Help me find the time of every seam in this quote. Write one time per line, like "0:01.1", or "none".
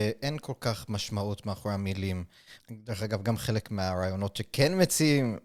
0:02.6